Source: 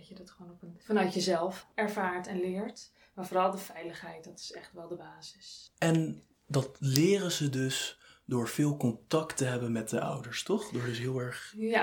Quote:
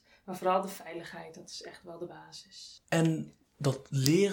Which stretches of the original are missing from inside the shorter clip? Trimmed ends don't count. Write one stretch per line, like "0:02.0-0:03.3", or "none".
none

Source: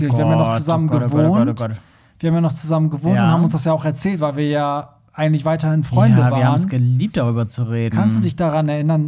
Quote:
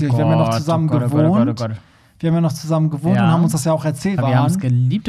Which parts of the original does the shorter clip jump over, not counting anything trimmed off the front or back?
0:04.2-0:06.3

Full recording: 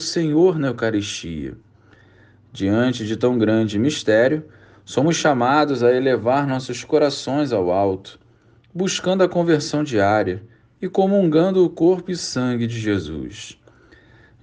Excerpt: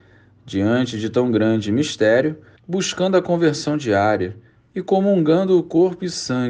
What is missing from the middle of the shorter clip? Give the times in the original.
0:04.6-0:08.6

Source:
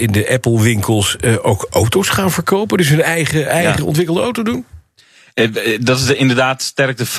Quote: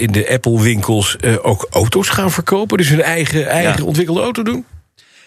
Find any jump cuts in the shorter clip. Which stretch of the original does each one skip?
none

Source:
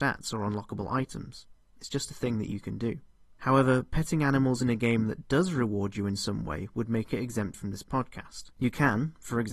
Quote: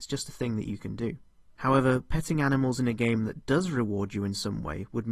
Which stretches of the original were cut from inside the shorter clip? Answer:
none

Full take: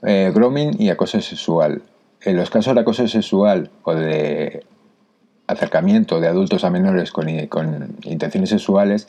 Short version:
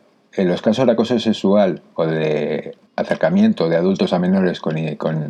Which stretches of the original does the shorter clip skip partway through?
0:04.7-0:05.4

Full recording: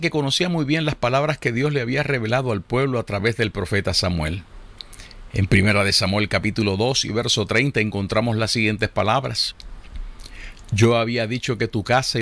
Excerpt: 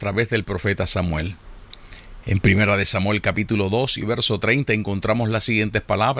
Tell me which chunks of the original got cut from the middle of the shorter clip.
none

